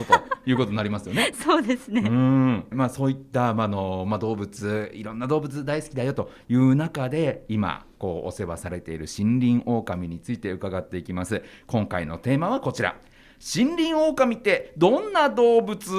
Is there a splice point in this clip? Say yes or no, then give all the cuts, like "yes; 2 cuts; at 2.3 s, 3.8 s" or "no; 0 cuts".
yes; 1 cut; at 2.7 s